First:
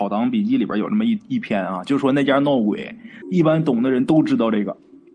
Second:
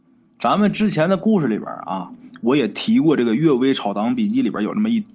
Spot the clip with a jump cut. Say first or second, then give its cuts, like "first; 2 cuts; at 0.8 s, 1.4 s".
first; 1 cut; at 3.2 s